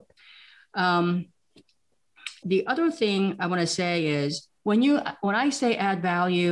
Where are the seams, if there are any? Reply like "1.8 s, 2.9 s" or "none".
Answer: 2.4 s, 4.6 s